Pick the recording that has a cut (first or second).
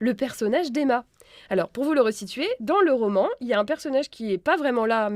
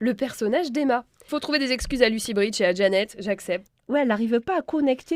second